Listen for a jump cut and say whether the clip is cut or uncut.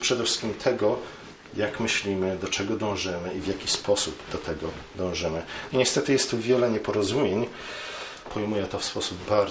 cut